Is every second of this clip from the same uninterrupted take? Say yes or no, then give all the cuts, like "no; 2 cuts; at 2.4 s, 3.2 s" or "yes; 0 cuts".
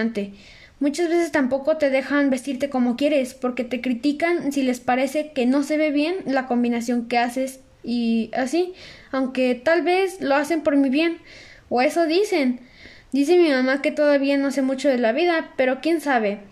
yes; 0 cuts